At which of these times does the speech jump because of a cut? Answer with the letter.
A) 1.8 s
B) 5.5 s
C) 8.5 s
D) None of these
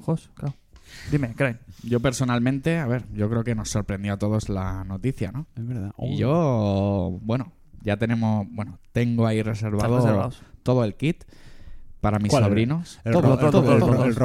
B